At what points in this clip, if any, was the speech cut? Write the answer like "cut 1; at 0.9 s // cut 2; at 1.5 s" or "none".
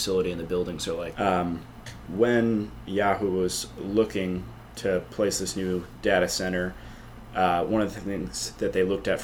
cut 1; at 1.1 s